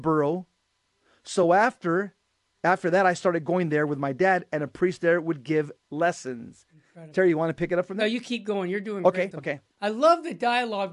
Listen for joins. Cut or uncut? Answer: cut